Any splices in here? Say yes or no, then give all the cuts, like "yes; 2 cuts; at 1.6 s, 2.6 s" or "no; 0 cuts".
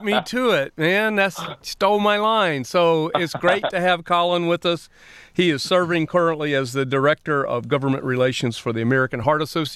no; 0 cuts